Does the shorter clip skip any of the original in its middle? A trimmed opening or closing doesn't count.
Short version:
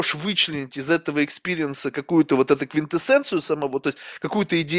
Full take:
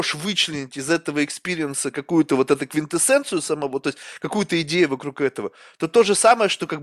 no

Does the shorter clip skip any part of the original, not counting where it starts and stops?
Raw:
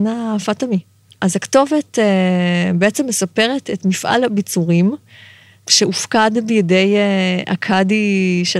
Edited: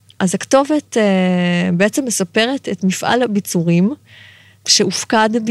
no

